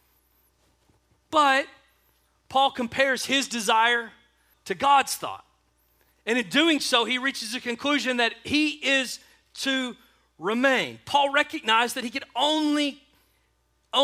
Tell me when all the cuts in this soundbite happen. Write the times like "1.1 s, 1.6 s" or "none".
4.5 s